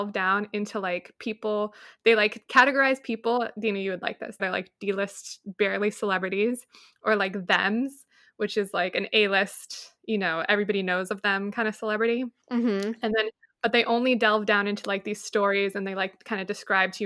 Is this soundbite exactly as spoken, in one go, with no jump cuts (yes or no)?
no